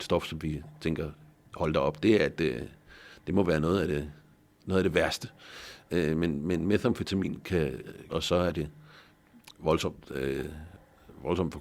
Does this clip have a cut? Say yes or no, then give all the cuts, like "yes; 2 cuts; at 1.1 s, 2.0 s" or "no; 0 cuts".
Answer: yes; 1 cut; at 8.1 s